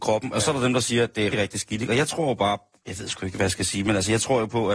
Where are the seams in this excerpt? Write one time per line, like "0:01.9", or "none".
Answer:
0:01.3